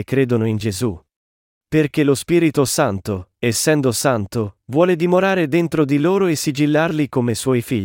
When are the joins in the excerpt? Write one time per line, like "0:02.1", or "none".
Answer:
0:01.6